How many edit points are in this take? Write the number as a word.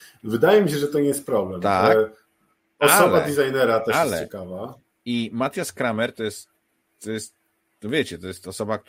one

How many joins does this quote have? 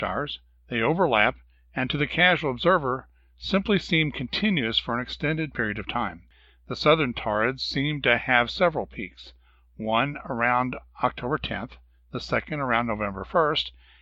zero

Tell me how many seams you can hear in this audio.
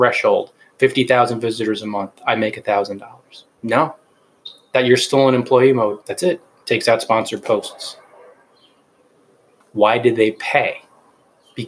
two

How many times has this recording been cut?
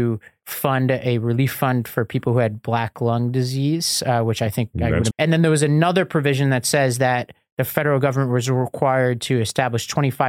one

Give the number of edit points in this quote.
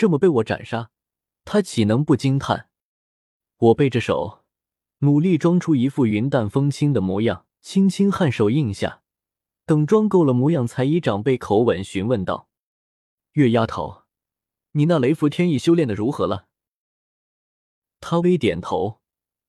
three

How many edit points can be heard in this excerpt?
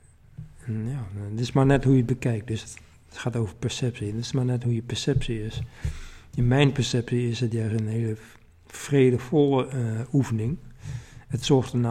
zero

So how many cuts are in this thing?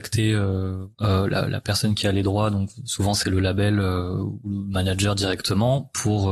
one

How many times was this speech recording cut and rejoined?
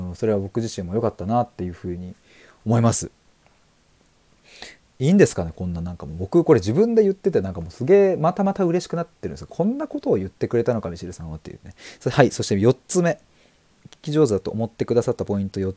zero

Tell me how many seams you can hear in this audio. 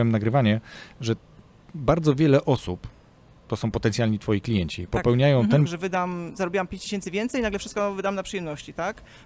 one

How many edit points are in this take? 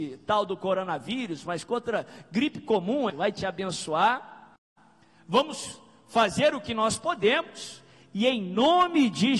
one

